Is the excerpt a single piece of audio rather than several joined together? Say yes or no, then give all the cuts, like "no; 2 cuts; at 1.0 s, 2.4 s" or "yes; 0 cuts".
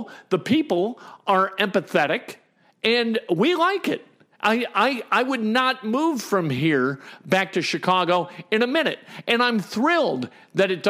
yes; 0 cuts